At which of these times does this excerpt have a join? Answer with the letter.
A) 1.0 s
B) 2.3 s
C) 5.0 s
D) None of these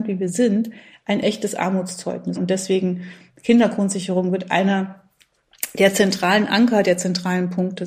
B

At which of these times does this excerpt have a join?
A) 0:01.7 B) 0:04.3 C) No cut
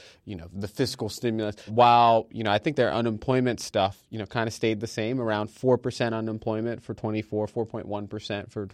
A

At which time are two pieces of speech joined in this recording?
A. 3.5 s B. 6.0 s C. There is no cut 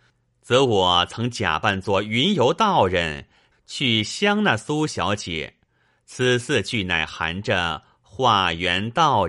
A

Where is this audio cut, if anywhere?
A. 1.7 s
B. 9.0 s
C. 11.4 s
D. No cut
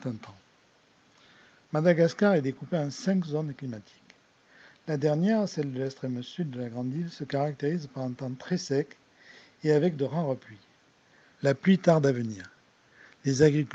C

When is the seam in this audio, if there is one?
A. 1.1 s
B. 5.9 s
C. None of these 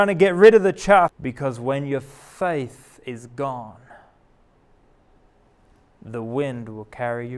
A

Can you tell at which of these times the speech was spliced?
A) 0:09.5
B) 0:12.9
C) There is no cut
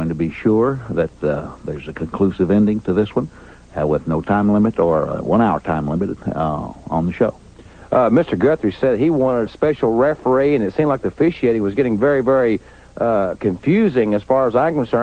A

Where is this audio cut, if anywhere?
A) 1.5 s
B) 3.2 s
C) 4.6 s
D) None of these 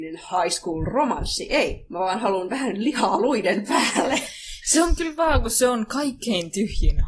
D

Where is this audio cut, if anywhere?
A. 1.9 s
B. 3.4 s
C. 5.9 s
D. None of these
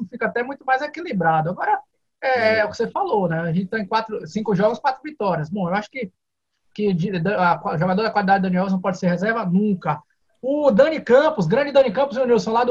D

